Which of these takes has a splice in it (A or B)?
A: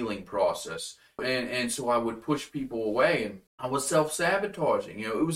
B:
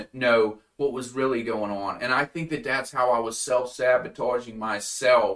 A